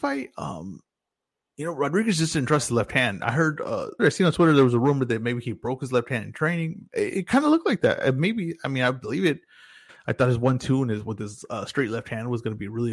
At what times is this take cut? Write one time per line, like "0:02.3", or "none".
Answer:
0:04.0
0:09.9